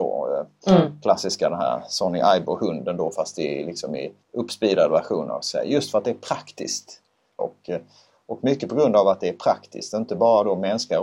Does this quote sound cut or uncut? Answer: cut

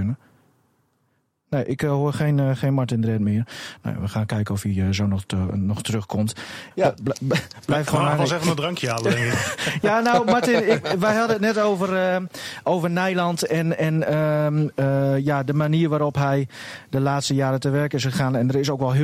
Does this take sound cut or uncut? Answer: cut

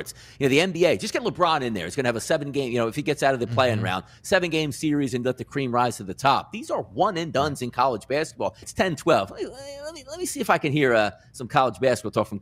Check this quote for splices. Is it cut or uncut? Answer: cut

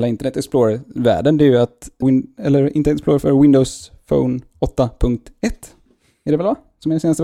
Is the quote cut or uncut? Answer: cut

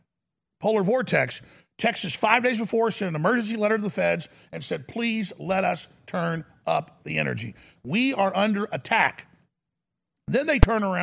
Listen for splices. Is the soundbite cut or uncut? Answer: cut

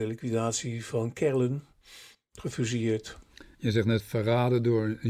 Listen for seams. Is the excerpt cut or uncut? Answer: cut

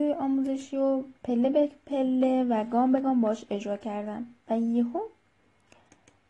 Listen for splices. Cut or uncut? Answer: cut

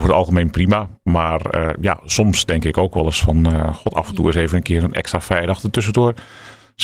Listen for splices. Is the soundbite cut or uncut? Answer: uncut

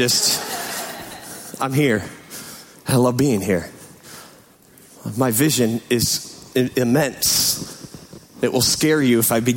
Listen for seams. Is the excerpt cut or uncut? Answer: uncut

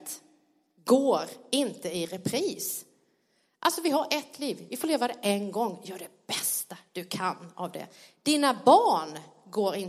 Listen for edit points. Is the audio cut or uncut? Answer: uncut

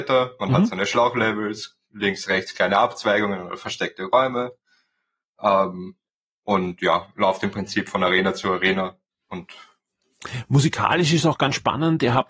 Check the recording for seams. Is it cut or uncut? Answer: uncut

